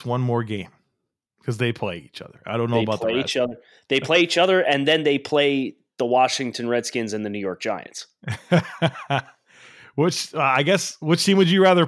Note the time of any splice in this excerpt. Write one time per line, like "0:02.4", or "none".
none